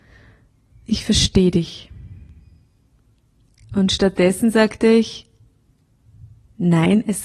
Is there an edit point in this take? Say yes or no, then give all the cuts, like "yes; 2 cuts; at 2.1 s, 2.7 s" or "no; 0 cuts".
no; 0 cuts